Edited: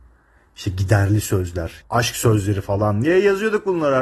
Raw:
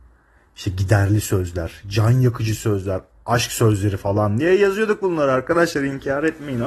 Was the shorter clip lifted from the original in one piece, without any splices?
no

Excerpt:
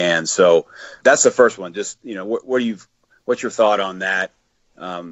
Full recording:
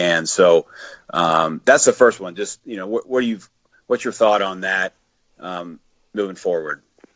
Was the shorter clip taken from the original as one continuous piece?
no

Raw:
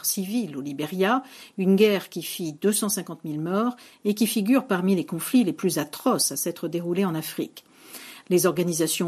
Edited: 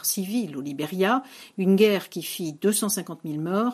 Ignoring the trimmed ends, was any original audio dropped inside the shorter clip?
no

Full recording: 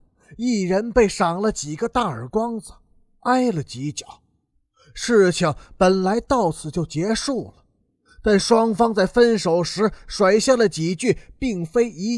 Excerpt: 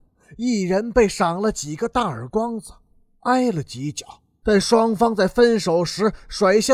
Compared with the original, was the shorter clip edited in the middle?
yes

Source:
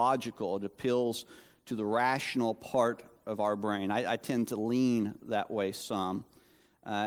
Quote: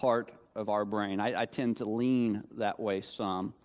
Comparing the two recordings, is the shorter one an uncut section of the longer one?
yes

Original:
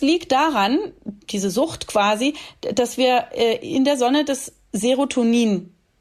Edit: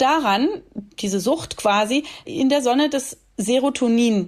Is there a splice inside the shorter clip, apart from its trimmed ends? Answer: yes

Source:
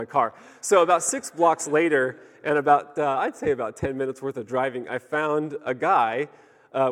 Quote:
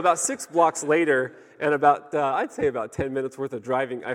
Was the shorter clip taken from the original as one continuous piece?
yes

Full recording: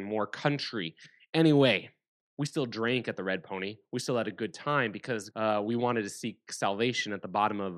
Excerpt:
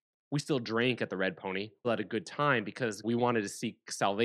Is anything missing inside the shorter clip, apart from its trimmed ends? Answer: yes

